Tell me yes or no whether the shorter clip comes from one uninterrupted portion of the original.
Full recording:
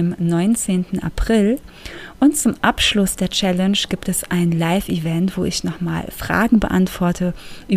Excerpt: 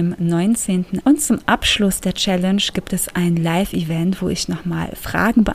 no